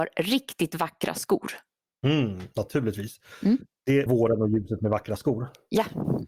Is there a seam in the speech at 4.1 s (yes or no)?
yes